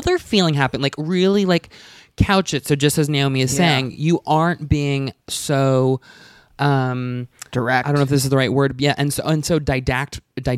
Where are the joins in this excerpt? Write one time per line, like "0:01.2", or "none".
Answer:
none